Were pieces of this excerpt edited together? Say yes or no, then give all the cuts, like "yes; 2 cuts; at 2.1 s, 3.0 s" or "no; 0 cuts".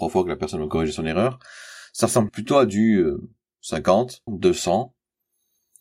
yes; 2 cuts; at 2.3 s, 4.3 s